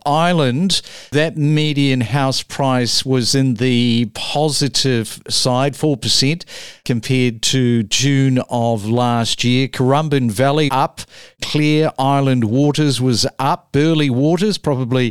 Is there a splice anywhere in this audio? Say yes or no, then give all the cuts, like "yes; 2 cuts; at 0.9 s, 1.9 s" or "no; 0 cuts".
yes; 1 cut; at 10.7 s